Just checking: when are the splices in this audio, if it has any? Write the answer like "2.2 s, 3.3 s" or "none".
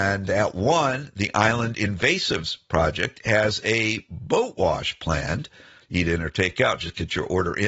5.8 s